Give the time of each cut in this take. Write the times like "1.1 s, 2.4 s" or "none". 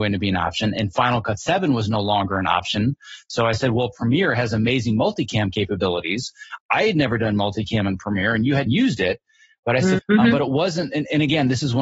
8.7 s, 10.0 s